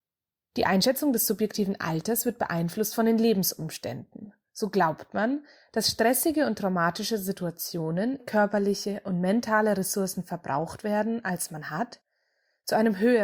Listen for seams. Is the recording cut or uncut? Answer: cut